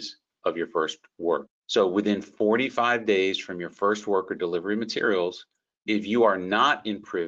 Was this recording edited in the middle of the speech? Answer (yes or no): yes